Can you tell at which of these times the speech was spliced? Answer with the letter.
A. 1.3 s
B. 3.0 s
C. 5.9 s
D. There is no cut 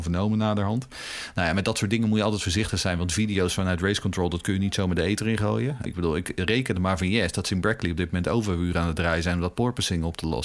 C